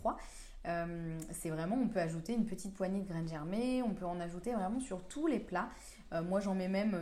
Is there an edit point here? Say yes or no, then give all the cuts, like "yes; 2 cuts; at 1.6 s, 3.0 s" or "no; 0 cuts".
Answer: no; 0 cuts